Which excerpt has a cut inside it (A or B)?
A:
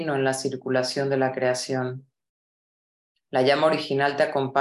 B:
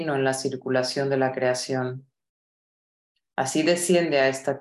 A